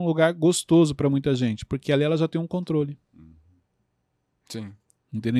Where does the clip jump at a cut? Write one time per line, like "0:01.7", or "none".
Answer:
none